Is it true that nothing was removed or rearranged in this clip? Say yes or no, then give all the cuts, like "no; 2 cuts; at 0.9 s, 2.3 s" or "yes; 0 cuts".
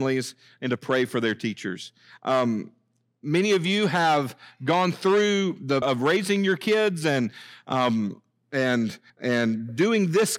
no; 2 cuts; at 5.8 s, 9.1 s